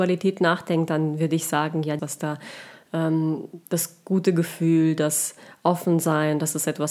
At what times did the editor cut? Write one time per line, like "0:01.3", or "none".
0:02.0